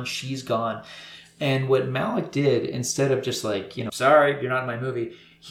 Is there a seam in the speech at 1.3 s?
no; 1 cut; at 3.9 s

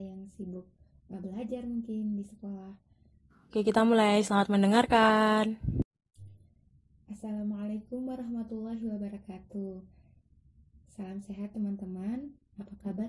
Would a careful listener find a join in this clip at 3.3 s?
yes; 1 cut; at 3.3 s

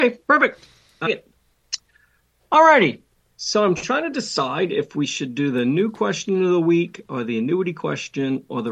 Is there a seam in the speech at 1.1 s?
yes; 1 cut; at 1.1 s

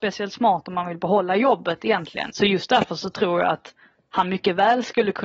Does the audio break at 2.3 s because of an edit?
yes; 1 cut; at 2.3 s

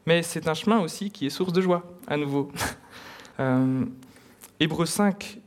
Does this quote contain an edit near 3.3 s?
yes; 1 cut; at 3.3 s

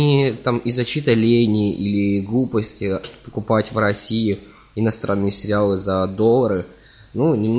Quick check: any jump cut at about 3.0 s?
yes; 1 cut; at 3.0 s

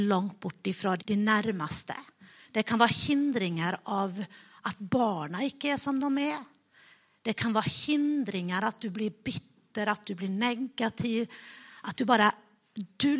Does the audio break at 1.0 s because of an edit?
yes; 1 cut; at 1.0 s

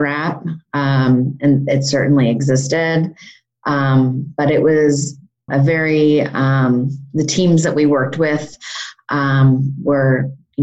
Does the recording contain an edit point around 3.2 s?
no; 1 cut; at 5.5 s

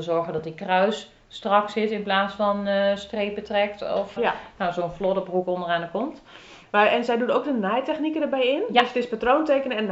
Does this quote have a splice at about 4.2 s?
yes; 2 cuts; at 4.2 s, 6.6 s

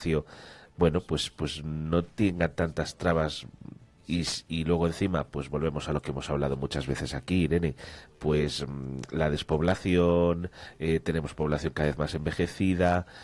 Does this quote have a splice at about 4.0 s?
yes; 1 cut; at 4.0 s

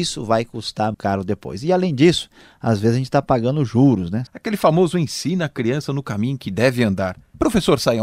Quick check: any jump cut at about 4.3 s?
yes; 2 cuts; at 0.9 s, 4.3 s

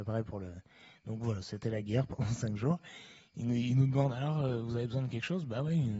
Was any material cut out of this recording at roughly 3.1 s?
no; 0 cuts

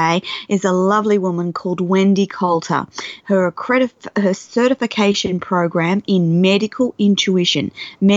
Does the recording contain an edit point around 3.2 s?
yes; 1 cut; at 3.2 s

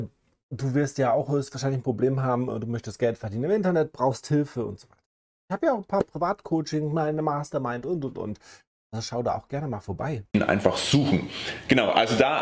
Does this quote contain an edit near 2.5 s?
no; 1 cut; at 10.3 s

